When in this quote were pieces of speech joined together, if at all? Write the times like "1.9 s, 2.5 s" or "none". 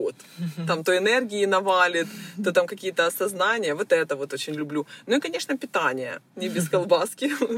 none